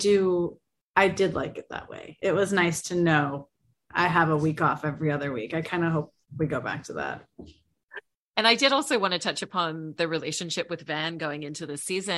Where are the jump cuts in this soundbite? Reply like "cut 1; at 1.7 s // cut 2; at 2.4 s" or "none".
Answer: none